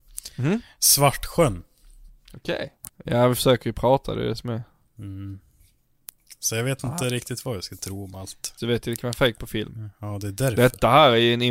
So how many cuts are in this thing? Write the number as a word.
two